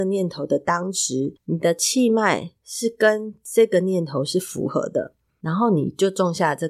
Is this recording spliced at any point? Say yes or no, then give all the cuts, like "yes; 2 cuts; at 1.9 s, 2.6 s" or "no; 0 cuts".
yes; 1 cut; at 5.3 s